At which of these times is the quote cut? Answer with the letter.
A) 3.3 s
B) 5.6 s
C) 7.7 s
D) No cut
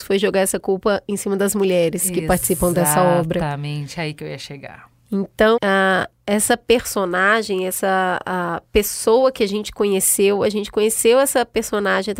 B